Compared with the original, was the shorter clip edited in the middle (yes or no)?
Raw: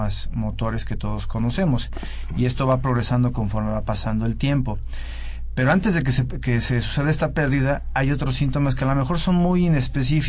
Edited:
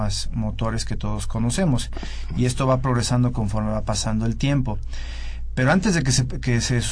no